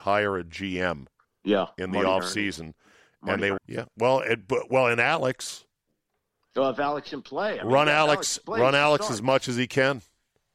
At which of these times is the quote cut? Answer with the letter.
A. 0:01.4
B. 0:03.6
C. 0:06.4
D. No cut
B